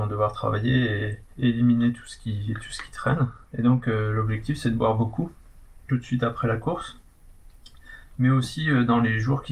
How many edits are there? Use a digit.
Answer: 1